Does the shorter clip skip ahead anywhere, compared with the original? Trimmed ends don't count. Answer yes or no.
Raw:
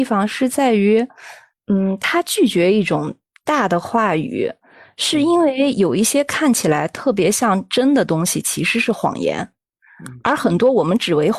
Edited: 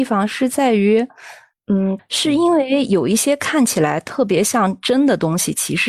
yes